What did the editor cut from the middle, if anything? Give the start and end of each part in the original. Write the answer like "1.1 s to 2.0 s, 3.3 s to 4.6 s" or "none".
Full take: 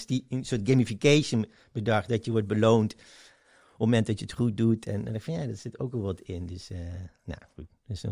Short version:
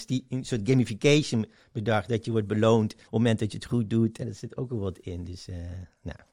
3.0 s to 3.7 s, 4.9 s to 5.4 s